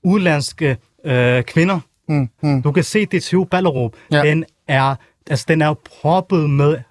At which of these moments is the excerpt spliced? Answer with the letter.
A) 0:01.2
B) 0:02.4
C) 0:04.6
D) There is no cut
B